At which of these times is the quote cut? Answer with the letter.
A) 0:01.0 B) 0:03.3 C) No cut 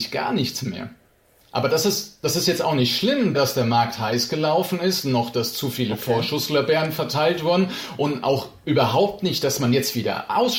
B